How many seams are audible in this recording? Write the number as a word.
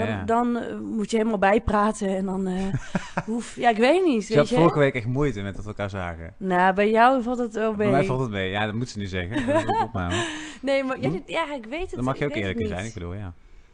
one